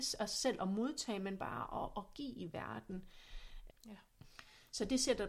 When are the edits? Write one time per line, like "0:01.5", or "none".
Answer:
0:03.7